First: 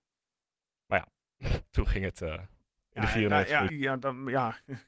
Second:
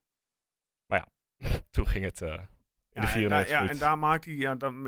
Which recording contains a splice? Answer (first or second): first